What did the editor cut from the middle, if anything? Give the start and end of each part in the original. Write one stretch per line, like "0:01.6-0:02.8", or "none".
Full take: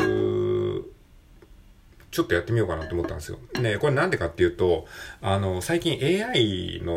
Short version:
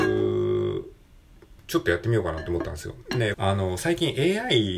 0:01.6-0:02.0
0:03.8-0:05.2